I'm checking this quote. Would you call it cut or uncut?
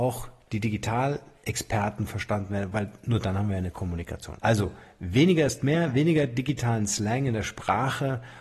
cut